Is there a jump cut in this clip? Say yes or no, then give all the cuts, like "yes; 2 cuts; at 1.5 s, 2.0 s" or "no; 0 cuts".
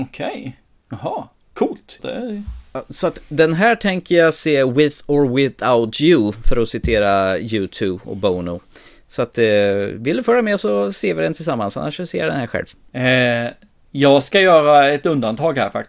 yes; 1 cut; at 2.0 s